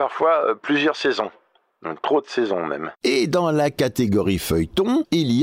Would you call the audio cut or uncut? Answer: uncut